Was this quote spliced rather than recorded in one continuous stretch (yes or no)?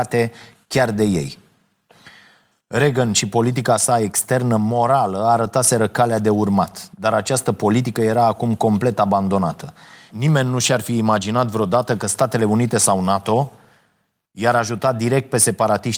yes